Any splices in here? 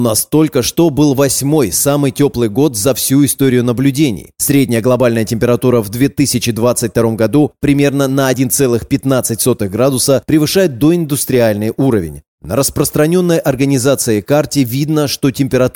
no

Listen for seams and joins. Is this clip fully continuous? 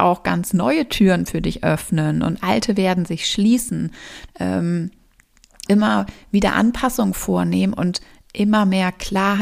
no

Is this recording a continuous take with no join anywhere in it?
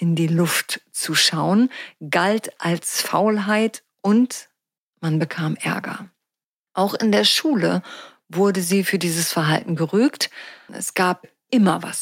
no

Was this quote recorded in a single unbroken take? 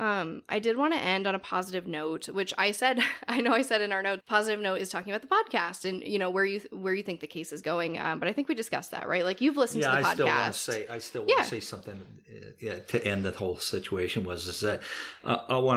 no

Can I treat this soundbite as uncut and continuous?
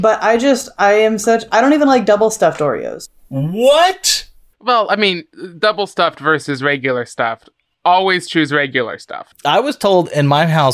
yes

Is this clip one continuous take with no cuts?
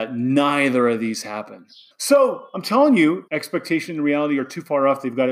no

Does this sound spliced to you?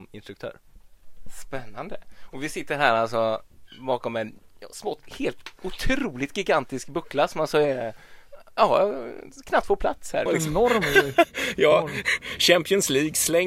yes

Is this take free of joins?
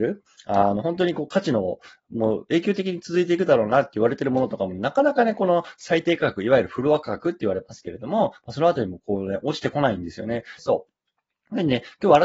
no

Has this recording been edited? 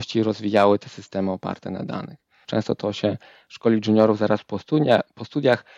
yes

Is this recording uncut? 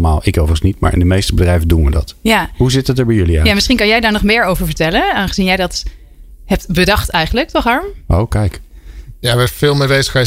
yes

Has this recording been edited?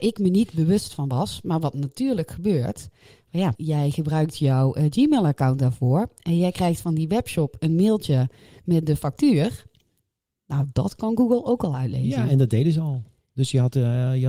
yes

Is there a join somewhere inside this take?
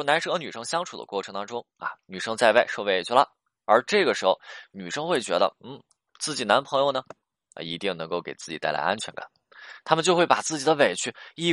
no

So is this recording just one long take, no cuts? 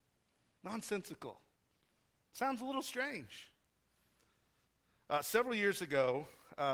yes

